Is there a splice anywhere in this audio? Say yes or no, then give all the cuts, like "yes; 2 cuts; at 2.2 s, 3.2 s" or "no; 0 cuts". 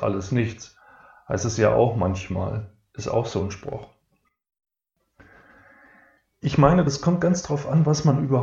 no; 0 cuts